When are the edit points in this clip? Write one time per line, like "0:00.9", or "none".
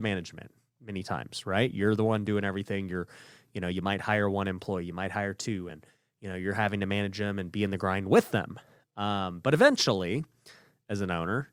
none